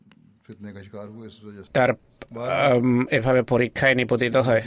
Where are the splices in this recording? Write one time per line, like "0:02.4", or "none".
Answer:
0:01.7